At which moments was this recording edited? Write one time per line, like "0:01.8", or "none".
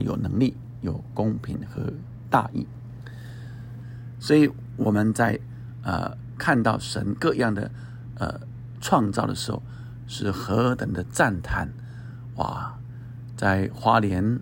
0:03.8